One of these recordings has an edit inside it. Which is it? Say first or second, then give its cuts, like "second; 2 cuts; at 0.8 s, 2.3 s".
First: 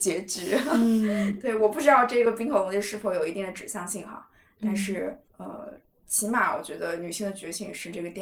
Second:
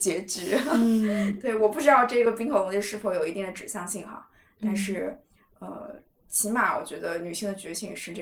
first; 1 cut; at 5.3 s